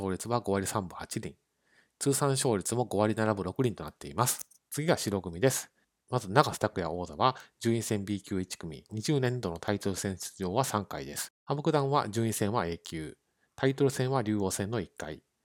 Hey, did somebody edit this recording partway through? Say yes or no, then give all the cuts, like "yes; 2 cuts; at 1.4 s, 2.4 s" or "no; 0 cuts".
yes; 2 cuts; at 4.6 s, 11.3 s